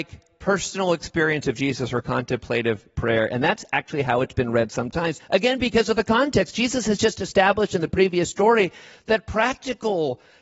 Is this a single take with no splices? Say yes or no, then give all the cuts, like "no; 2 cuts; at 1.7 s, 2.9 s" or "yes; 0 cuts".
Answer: no; 1 cut; at 5.2 s